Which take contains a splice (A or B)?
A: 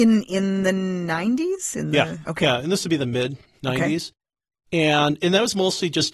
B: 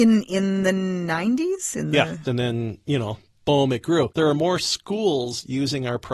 B